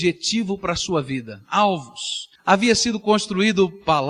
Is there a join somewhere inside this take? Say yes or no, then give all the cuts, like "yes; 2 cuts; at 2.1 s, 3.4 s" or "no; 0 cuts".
yes; 1 cut; at 2.4 s